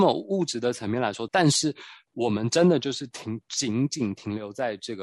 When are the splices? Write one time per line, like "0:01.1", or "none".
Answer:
0:01.3